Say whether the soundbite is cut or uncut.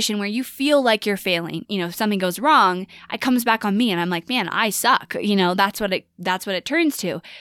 cut